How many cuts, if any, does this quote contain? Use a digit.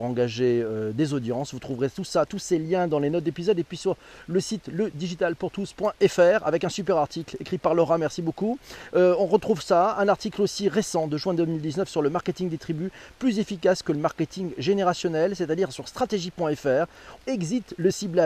1